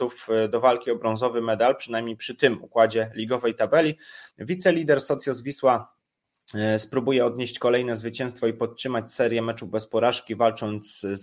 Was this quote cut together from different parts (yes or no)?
yes